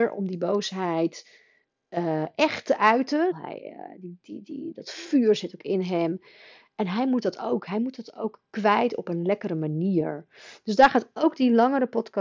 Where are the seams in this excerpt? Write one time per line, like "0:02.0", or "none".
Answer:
0:03.3